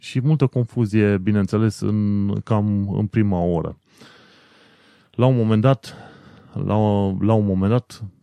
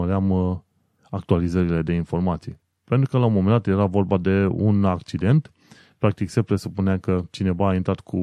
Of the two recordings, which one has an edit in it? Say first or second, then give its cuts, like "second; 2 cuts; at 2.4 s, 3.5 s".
second; 1 cut; at 1.0 s